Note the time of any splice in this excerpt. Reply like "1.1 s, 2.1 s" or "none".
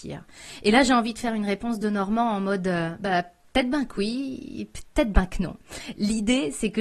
none